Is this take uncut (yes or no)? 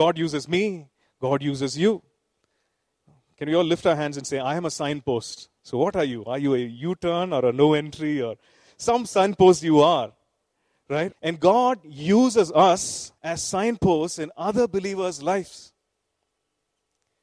no